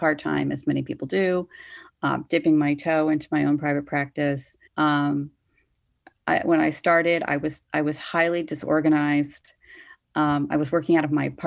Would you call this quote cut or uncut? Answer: cut